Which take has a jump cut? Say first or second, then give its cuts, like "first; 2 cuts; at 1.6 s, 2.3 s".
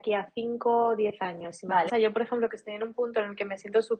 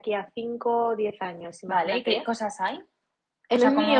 first; 1 cut; at 1.9 s